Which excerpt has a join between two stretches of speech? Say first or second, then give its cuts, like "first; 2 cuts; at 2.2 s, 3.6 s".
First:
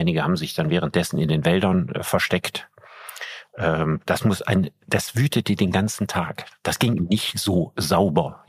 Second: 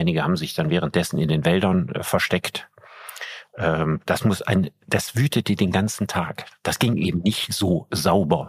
first; 1 cut; at 7.0 s